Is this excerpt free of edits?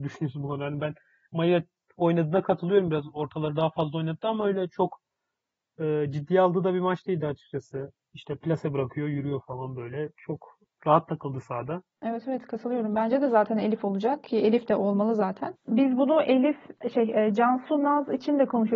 yes; 0 cuts

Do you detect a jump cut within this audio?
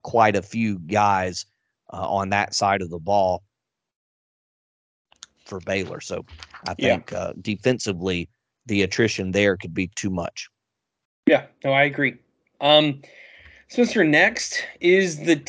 no; 0 cuts

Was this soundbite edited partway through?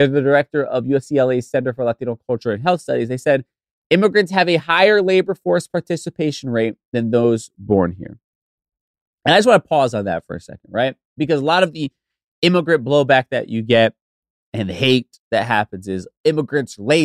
no; 0 cuts

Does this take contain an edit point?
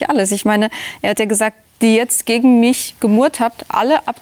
yes; 1 cut; at 1.6 s

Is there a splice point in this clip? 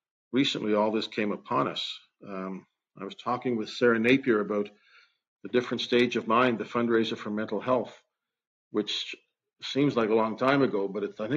no; 0 cuts

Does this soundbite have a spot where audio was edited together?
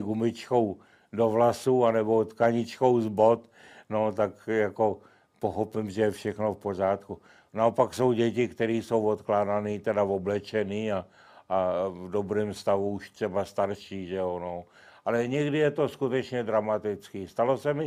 no; 0 cuts

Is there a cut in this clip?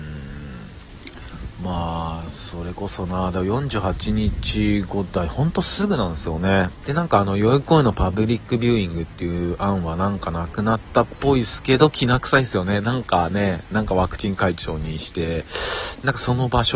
yes; 1 cut; at 6.8 s

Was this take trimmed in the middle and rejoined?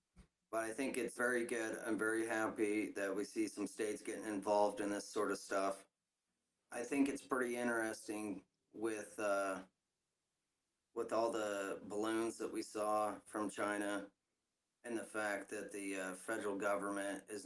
yes; 1 cut; at 1.2 s

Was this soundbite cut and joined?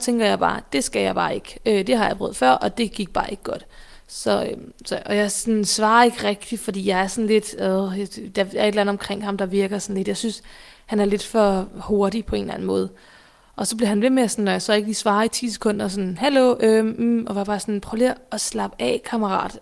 no; 0 cuts

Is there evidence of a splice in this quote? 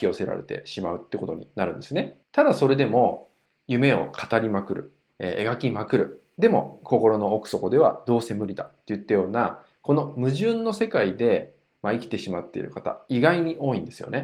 yes; 1 cut; at 2.2 s

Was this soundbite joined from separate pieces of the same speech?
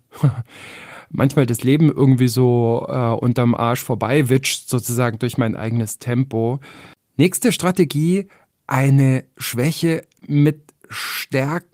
no; 0 cuts

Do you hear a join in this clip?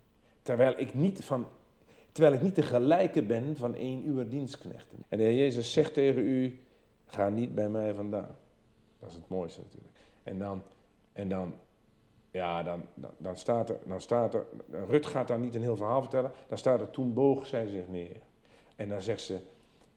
yes; 1 cut; at 5.0 s

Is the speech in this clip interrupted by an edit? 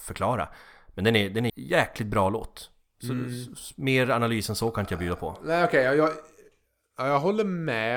yes; 1 cut; at 1.5 s

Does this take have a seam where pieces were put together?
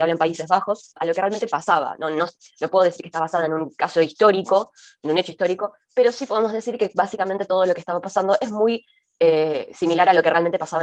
yes; 1 cut; at 1.0 s

